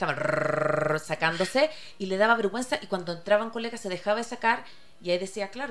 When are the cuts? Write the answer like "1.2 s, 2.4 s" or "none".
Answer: none